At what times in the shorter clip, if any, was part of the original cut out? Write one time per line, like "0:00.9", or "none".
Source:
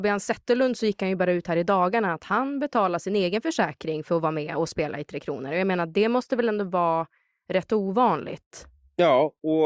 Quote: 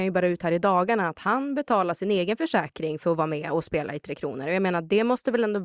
none